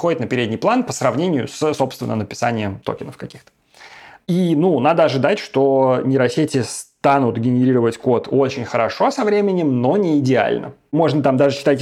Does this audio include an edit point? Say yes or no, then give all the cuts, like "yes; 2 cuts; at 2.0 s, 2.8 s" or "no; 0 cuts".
no; 0 cuts